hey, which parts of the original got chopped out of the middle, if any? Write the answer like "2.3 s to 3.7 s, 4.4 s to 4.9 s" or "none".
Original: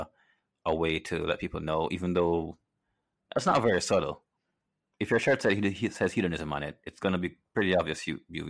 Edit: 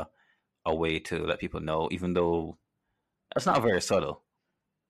none